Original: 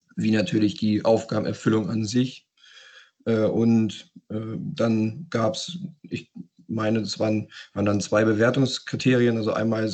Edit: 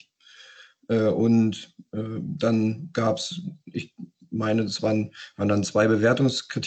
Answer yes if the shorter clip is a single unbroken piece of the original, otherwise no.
yes